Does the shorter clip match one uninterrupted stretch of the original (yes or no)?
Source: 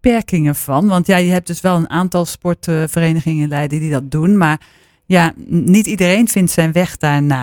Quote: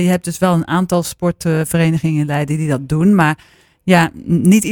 yes